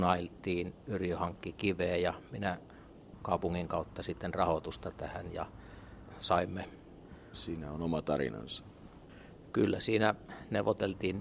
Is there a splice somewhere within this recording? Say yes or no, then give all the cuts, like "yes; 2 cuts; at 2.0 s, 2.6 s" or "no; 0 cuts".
yes; 1 cut; at 7.3 s